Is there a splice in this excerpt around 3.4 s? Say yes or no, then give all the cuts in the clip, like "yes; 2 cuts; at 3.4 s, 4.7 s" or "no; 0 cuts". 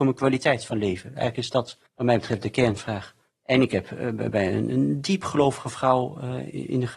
no; 1 cut; at 1.9 s